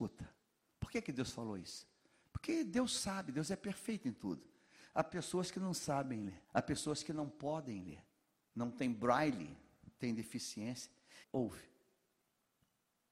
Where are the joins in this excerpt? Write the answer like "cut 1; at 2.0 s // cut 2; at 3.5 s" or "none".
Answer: cut 1; at 6.4 s // cut 2; at 11.2 s